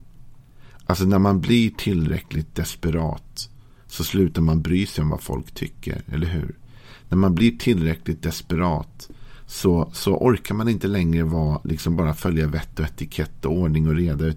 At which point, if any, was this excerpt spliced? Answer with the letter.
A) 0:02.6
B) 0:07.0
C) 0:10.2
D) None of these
D